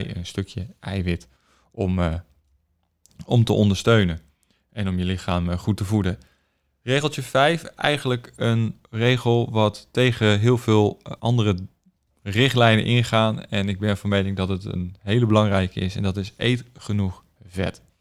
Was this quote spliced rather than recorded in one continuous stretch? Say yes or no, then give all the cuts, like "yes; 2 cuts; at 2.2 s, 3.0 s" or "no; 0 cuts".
yes; 1 cut; at 11.2 s